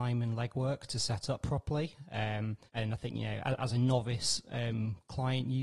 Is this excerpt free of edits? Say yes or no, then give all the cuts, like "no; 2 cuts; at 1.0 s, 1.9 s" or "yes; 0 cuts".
no; 1 cut; at 2.7 s